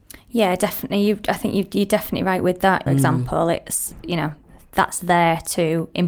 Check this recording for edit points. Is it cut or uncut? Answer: cut